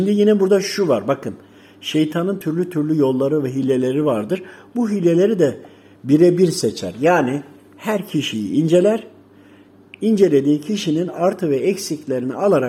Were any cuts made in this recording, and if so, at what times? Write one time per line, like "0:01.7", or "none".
none